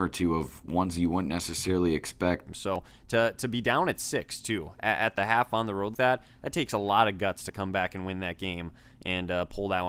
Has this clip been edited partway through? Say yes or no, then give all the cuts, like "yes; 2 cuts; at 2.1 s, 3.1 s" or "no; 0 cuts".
yes; 2 cuts; at 2.5 s, 5.9 s